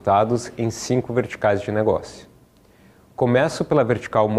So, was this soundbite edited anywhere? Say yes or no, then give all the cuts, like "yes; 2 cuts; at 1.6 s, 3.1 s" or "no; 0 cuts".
no; 0 cuts